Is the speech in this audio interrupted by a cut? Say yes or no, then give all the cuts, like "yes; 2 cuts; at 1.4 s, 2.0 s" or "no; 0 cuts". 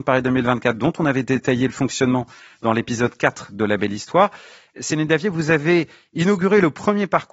no; 0 cuts